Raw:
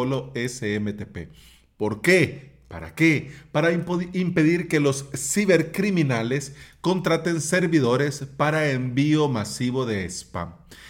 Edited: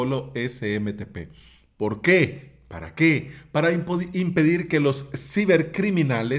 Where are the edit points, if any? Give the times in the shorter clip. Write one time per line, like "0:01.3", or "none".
none